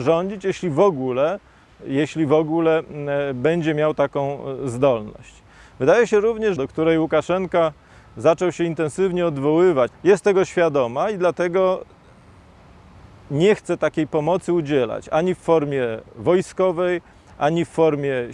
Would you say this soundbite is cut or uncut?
cut